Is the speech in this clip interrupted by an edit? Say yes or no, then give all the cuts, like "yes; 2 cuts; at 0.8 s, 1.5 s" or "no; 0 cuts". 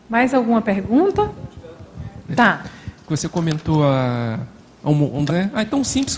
yes; 2 cuts; at 2.3 s, 5.3 s